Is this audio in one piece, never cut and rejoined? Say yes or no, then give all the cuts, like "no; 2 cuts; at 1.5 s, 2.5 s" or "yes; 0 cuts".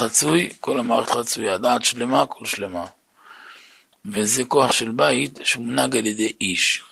yes; 0 cuts